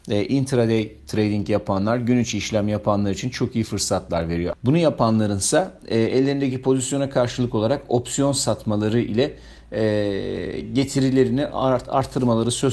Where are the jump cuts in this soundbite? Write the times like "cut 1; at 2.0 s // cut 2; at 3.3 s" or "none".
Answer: cut 1; at 4.5 s